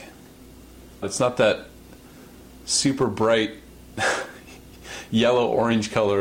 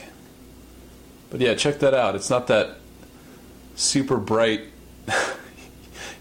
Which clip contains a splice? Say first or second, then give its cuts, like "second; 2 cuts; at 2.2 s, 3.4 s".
first; 1 cut; at 1.0 s